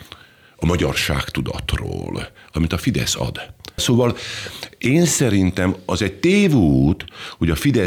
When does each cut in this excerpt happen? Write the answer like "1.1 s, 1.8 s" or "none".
3.8 s